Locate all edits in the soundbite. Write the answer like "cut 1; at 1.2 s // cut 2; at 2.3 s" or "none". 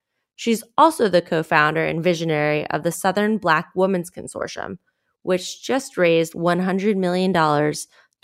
none